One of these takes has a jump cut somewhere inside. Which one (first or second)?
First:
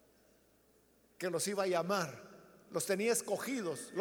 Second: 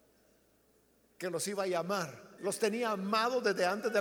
second